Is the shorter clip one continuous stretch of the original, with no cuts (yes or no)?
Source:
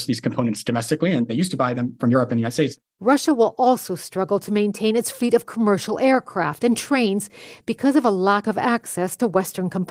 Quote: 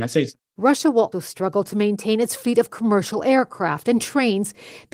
no